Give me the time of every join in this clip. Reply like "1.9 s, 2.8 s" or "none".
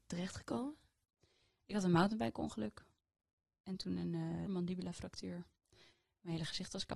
4.5 s